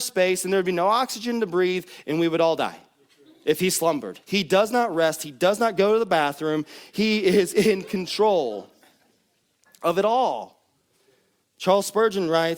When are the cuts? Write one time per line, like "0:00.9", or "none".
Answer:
0:04.2